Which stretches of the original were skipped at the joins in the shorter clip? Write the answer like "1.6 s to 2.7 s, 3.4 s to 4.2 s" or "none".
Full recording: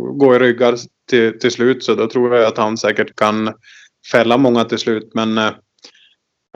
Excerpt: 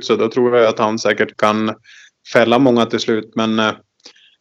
none

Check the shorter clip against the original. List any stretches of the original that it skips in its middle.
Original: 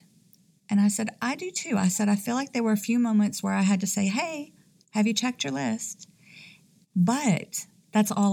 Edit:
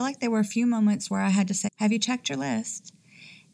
4.0 s to 4.8 s

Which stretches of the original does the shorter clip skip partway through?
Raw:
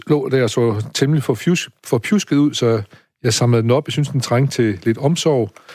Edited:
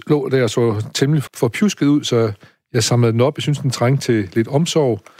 1.3 s to 1.8 s

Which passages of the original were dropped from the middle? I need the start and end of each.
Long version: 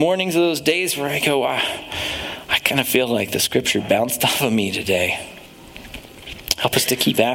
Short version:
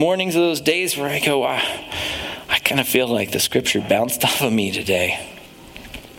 none

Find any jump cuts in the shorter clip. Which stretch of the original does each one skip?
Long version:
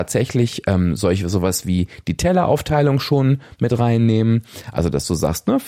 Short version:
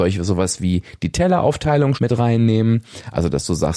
3.0 s to 3.6 s

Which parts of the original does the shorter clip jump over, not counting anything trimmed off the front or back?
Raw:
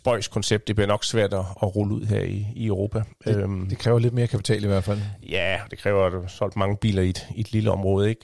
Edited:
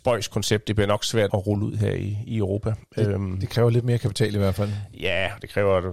1.3 s to 1.6 s

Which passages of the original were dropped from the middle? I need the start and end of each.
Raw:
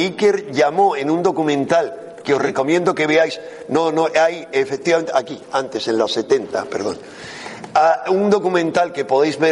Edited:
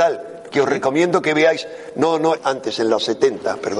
4.1 s to 5.4 s

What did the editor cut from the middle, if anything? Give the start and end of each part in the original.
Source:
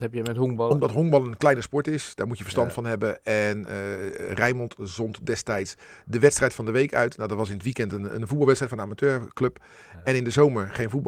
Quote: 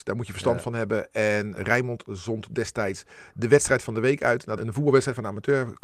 3.7 s to 4.3 s, 7.3 s to 8.1 s

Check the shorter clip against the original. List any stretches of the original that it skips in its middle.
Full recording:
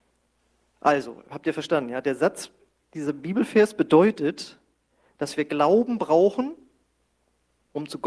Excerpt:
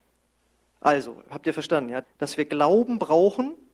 2.0 s to 5.0 s

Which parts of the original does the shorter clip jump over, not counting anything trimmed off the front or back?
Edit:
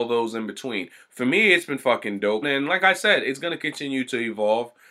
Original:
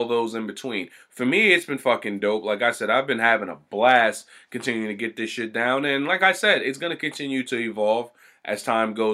2.4 s to 5.8 s

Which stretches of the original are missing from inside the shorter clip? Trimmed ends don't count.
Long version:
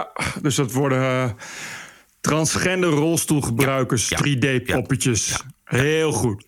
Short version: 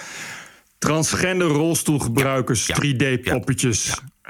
none

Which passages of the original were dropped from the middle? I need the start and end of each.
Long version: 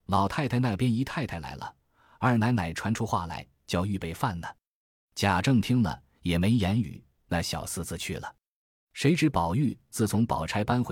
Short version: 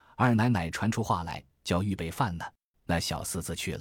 4.8 s to 7.2 s

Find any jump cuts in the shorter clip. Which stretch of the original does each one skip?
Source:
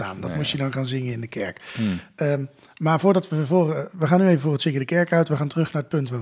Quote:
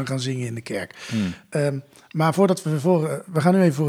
none

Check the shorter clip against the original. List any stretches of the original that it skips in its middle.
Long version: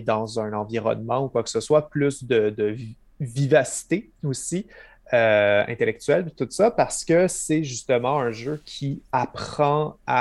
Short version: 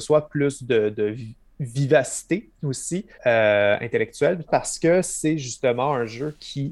4.8 s to 5.0 s, 6.3 s to 6.7 s

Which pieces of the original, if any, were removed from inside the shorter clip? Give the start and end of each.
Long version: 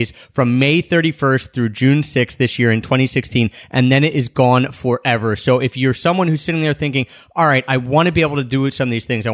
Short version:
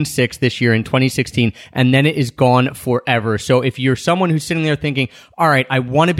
none

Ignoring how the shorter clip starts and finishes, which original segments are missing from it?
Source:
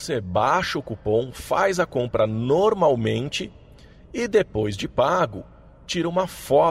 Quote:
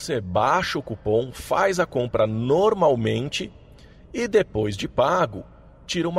none

